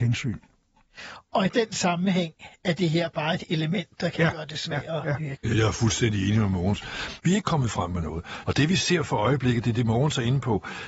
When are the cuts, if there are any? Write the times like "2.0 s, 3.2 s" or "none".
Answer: 5.4 s, 7.2 s, 8.4 s